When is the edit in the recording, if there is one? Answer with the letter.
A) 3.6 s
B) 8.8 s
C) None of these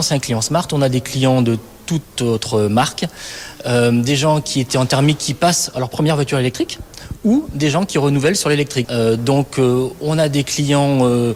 B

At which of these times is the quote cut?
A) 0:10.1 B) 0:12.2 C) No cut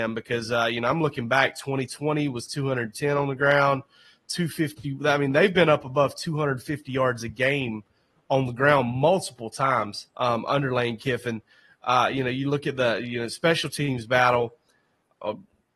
A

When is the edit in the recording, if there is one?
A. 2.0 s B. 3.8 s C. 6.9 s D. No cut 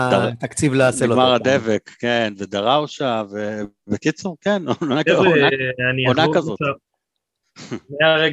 C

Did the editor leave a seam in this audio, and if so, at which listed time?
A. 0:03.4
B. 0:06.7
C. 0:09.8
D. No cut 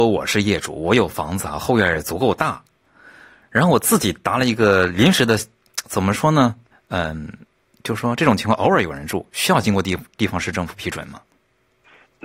B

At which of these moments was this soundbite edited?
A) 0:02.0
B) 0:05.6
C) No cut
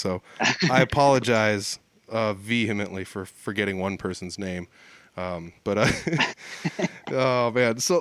B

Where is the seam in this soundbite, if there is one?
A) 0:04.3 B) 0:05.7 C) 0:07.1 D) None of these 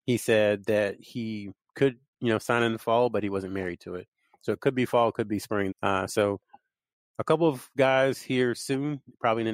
B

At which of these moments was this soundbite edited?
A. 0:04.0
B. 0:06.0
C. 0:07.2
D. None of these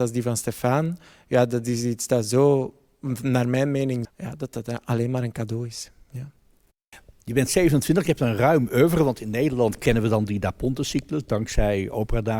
A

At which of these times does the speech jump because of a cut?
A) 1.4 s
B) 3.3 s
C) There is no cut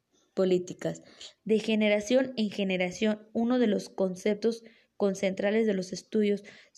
A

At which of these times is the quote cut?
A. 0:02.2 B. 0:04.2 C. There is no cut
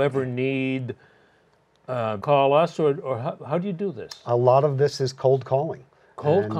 A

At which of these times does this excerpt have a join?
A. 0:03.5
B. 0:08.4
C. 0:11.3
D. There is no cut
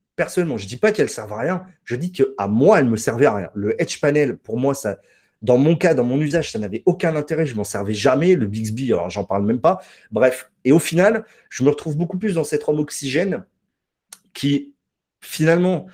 D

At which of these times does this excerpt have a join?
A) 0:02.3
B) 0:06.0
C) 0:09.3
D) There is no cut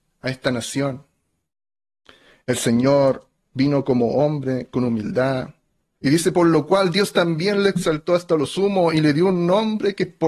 B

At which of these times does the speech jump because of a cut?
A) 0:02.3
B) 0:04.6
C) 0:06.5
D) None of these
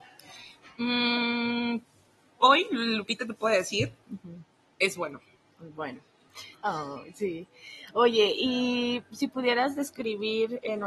C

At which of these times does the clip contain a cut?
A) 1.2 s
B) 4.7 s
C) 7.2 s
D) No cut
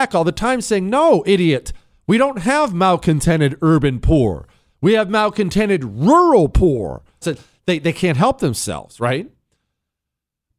C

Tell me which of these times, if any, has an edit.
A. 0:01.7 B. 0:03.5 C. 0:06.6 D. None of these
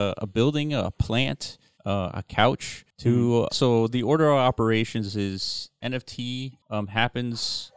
B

